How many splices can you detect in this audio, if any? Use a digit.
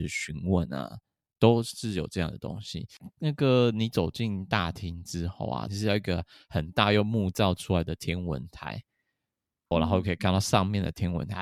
2